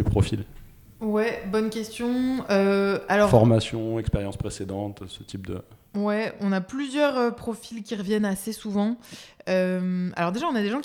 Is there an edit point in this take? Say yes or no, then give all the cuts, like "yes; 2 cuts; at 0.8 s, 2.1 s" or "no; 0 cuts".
no; 0 cuts